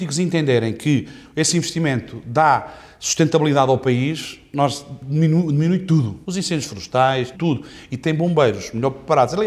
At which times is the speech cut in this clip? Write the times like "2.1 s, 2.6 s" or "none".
6.2 s, 7.3 s